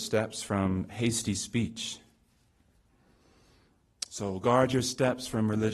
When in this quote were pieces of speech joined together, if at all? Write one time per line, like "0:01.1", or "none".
0:04.1